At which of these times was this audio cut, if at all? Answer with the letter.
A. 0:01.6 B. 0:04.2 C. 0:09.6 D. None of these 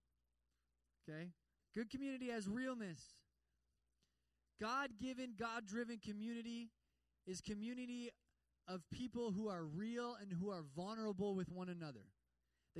A